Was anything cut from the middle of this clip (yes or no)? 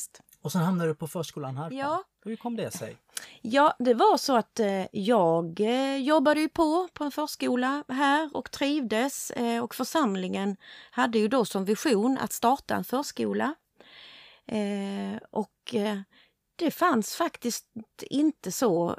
no